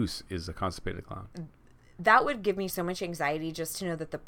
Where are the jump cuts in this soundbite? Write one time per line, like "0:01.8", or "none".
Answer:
none